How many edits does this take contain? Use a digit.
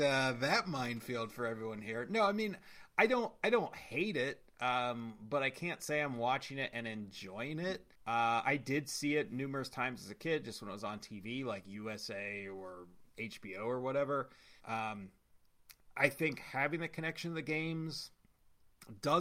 2